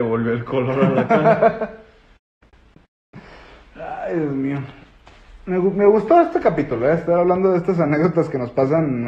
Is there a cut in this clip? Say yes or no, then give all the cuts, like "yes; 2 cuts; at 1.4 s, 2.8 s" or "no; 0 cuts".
no; 0 cuts